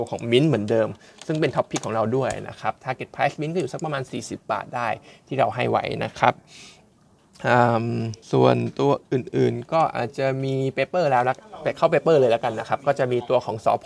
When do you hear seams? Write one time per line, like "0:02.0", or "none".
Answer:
0:08.2

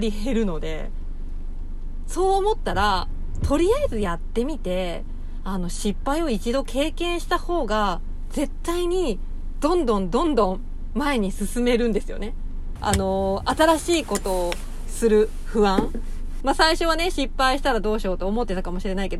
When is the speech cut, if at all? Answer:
0:12.8
0:16.4

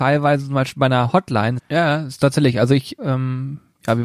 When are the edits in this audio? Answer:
0:01.6
0:03.0

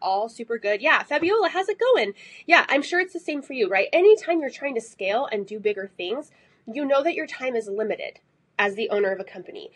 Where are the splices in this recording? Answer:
none

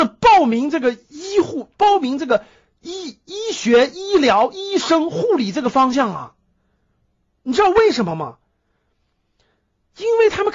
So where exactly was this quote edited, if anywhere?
none

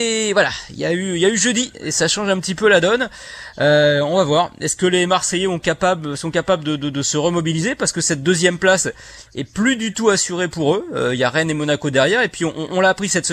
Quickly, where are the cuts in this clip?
none

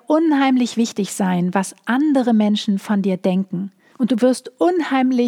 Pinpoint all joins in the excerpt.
0:03.9

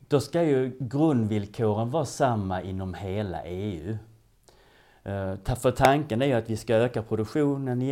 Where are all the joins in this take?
none

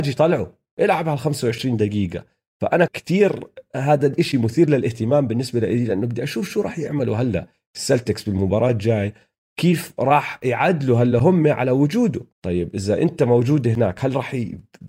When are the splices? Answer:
0:02.9
0:12.3

